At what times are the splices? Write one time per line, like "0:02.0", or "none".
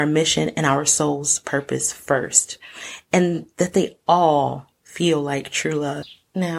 none